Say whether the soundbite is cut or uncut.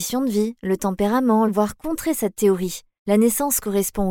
cut